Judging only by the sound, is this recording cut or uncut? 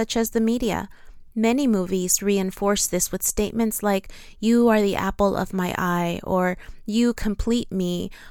uncut